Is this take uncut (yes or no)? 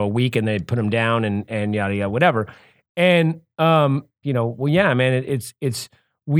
no